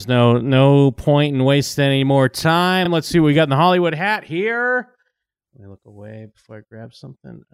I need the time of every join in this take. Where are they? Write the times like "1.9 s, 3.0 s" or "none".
none